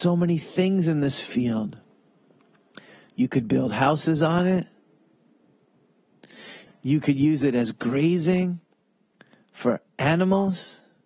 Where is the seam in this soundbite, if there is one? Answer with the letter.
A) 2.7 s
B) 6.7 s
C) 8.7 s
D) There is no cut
B